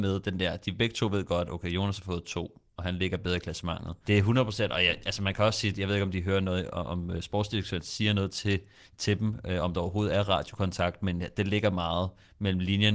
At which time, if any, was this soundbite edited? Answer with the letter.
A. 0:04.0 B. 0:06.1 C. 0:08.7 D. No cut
A